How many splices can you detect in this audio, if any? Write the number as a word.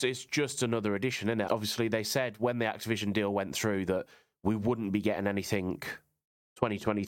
one